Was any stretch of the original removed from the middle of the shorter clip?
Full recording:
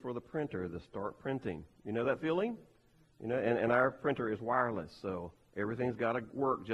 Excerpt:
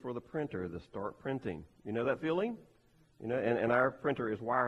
no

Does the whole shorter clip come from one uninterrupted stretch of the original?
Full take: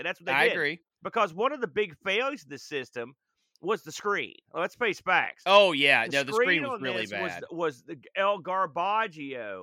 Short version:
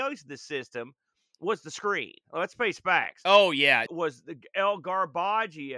no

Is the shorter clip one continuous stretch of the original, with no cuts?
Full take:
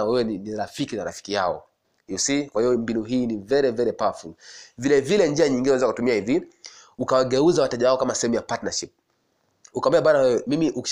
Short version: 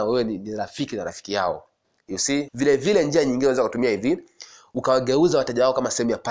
no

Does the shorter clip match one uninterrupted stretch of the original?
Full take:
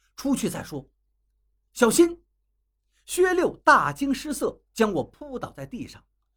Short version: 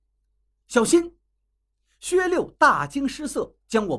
yes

